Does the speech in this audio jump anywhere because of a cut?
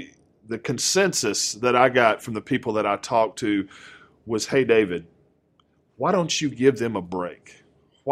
no; 0 cuts

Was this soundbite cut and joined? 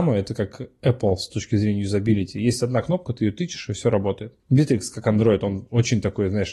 yes; 1 cut; at 4.4 s

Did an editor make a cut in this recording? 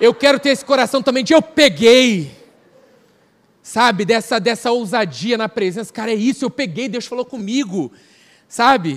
no; 0 cuts

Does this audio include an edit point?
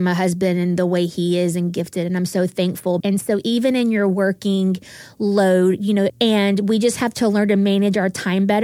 yes; 2 cuts; at 3.0 s, 6.1 s

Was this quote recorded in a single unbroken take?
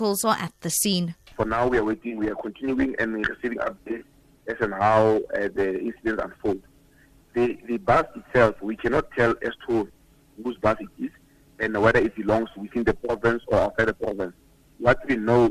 yes; 0 cuts

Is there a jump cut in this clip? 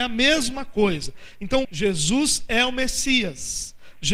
yes; 1 cut; at 1.6 s

